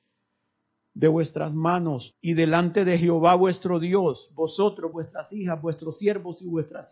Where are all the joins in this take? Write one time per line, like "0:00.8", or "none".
0:02.1
0:04.9